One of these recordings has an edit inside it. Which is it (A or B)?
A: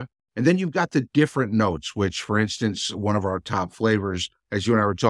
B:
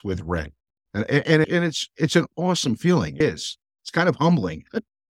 B